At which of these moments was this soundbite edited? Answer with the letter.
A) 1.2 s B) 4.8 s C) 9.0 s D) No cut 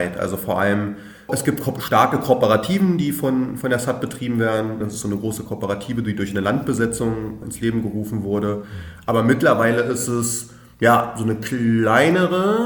B